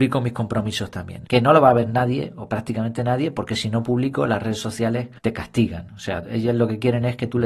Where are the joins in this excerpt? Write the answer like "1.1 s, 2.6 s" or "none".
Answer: 1.3 s, 5.2 s